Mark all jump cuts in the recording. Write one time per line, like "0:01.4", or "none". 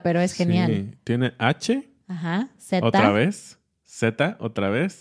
none